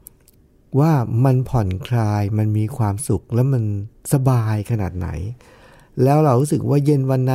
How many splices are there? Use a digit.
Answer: 0